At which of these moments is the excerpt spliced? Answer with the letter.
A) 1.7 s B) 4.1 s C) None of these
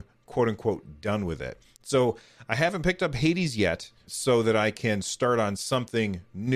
B